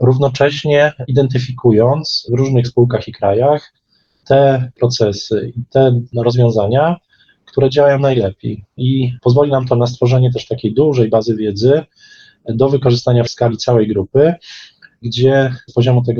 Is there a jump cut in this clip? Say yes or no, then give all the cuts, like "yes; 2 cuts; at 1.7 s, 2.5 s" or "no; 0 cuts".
no; 0 cuts